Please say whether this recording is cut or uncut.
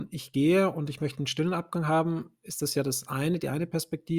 uncut